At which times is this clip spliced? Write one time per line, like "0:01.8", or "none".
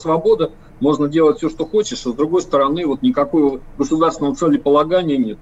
none